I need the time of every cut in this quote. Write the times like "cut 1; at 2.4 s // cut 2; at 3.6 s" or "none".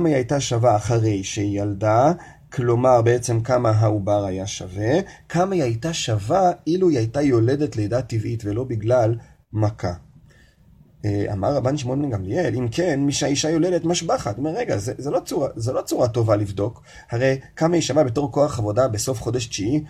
none